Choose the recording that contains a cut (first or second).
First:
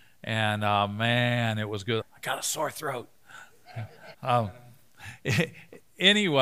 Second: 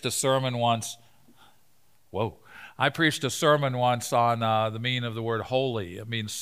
first